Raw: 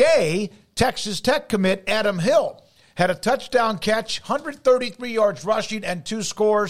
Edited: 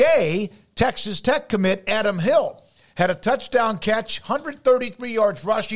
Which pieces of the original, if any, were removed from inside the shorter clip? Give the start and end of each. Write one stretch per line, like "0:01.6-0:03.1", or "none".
none